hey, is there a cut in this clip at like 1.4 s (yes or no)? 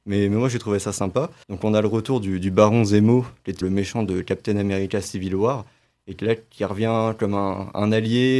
yes